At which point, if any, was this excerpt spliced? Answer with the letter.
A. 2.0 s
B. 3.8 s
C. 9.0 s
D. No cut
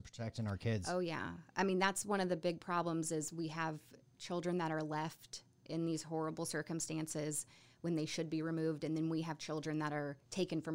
D